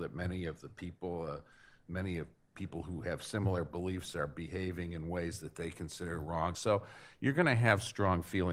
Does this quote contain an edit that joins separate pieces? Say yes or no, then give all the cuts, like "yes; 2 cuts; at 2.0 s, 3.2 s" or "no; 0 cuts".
no; 0 cuts